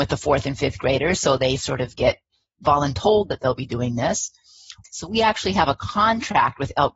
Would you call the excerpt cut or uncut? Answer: cut